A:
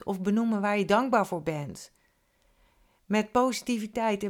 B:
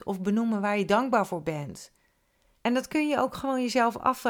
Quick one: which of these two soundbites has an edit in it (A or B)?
B